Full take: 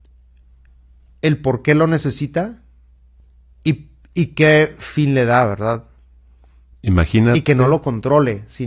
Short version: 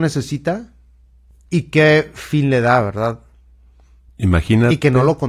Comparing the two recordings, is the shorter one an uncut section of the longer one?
no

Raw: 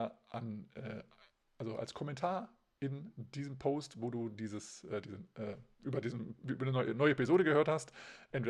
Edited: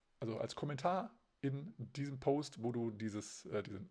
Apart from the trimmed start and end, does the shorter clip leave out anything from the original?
no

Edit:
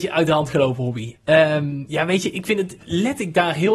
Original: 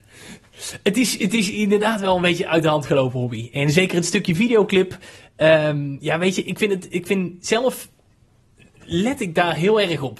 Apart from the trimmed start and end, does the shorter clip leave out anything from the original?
yes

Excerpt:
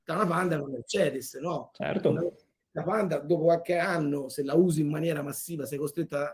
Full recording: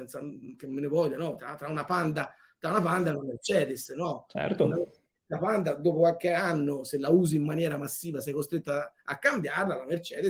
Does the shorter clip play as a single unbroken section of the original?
yes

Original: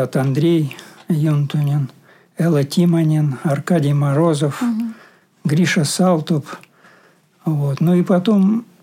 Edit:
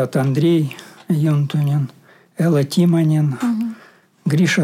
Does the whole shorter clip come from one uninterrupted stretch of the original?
no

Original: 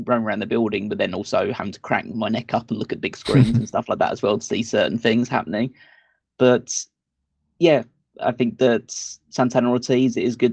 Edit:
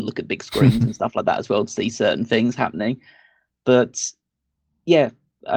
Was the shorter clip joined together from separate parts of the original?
no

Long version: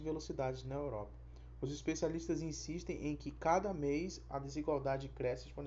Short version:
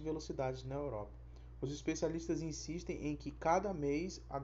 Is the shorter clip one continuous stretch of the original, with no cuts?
yes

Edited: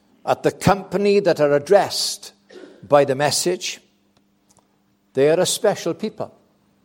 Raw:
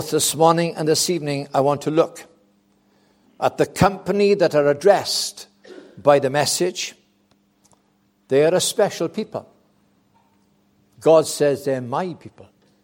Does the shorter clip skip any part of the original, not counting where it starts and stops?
no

